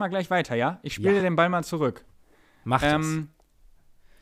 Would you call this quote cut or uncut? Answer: uncut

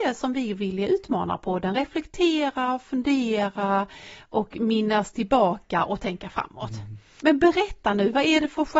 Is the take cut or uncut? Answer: uncut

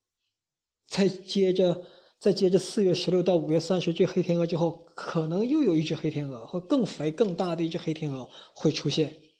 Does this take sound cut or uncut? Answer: uncut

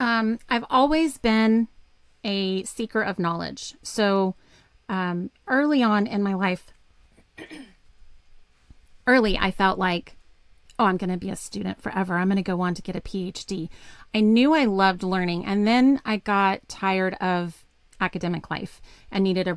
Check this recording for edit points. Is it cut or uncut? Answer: uncut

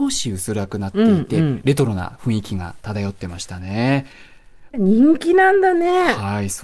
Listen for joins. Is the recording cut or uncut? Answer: cut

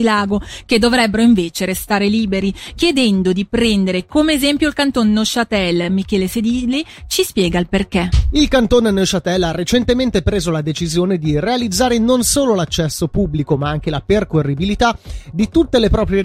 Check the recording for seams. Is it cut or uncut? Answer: uncut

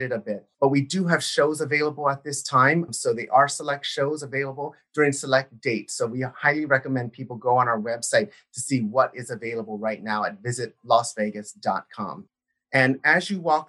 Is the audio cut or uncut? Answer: uncut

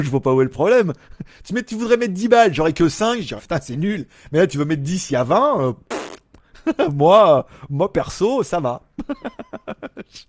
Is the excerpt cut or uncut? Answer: cut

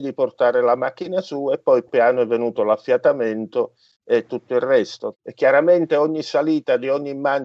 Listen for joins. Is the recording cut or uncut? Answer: cut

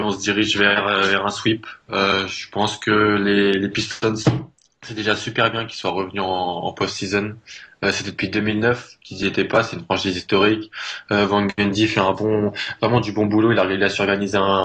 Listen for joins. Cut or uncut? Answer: uncut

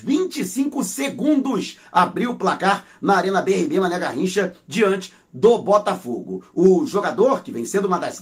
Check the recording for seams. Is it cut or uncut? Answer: uncut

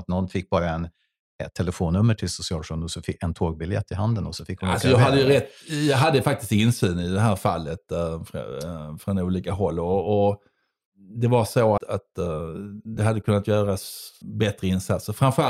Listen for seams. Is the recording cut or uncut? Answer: cut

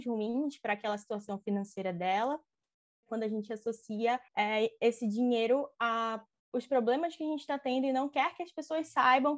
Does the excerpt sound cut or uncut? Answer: cut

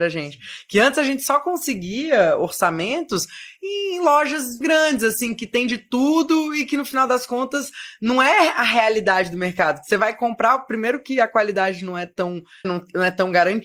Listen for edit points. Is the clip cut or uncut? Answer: cut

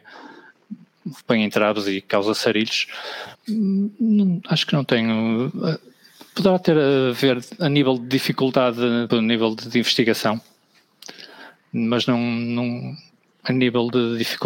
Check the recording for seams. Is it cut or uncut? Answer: cut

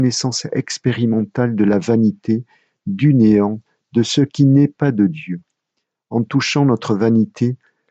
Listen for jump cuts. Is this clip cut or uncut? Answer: uncut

